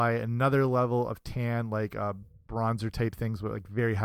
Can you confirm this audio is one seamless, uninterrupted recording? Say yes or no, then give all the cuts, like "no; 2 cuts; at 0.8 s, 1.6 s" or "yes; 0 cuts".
yes; 0 cuts